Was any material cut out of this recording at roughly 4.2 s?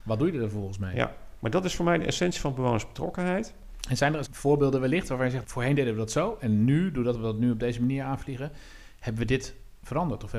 yes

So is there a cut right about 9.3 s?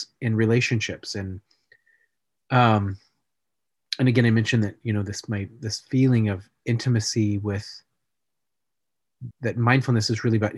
yes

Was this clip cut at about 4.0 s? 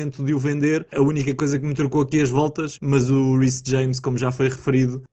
no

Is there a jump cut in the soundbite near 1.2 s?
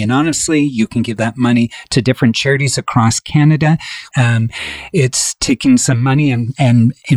no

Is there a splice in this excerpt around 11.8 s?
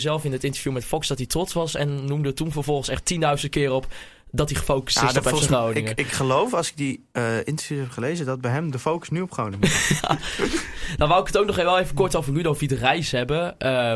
no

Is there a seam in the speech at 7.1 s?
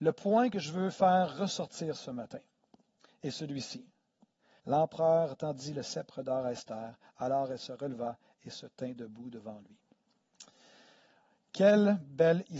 no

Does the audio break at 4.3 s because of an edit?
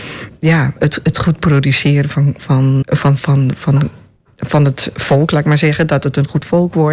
no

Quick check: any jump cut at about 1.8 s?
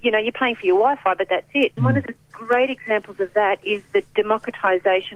yes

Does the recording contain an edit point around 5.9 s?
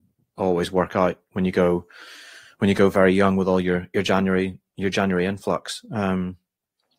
no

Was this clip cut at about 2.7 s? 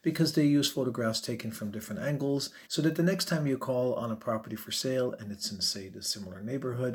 yes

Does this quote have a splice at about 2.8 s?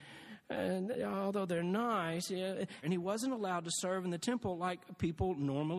yes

